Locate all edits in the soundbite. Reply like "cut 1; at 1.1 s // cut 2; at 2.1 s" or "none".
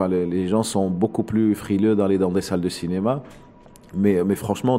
none